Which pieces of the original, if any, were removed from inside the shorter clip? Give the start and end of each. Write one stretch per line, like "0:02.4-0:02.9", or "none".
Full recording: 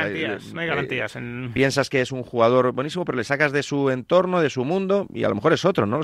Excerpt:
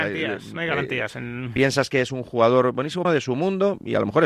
0:03.0-0:04.3